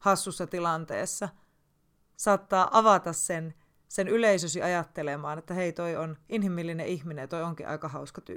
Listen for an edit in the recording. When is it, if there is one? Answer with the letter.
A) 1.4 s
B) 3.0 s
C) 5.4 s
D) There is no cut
D